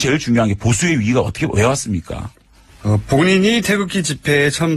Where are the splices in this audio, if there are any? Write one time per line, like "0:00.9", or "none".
0:02.7

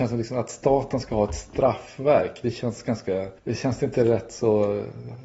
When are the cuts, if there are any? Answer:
0:03.4

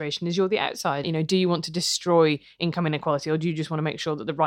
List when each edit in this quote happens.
0:01.0

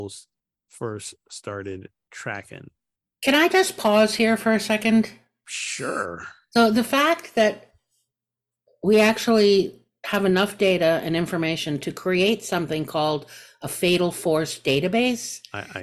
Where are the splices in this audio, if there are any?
none

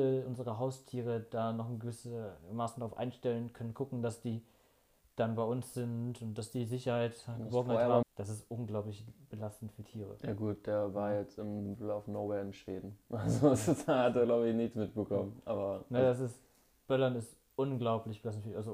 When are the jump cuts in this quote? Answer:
0:08.0

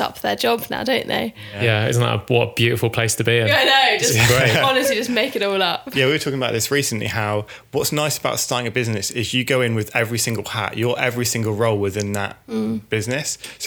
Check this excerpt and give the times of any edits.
none

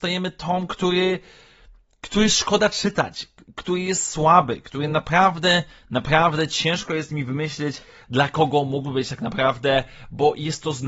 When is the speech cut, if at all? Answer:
none

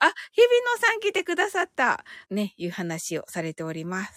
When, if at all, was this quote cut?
0:02.2

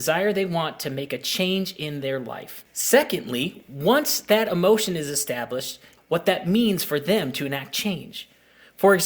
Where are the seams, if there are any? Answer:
0:06.0

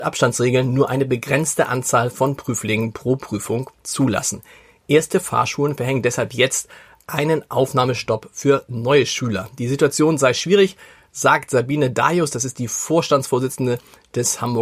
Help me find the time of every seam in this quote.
none

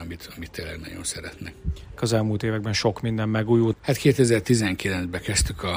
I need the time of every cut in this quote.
0:02.0
0:03.7

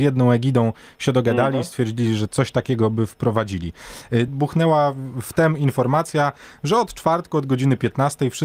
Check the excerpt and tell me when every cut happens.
0:02.3
0:04.3

